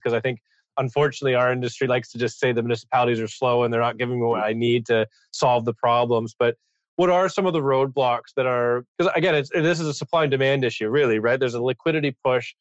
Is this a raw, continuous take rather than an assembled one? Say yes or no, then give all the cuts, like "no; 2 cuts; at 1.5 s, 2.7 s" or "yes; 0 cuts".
yes; 0 cuts